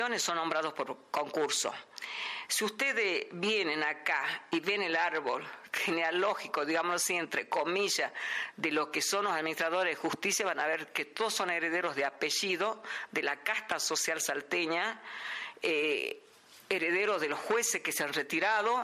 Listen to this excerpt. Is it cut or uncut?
uncut